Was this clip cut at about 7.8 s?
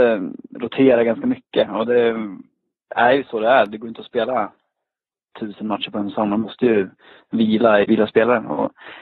yes; 1 cut; at 7.8 s

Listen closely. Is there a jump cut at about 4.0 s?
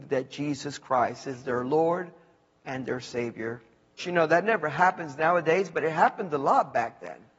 yes; 1 cut; at 4.0 s

